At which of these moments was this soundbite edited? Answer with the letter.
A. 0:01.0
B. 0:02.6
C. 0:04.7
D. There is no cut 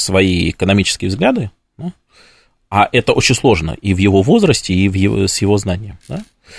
D